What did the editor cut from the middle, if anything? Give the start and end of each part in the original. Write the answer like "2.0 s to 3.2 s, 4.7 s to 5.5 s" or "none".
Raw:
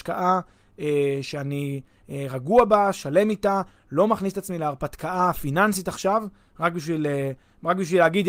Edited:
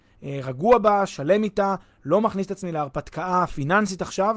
none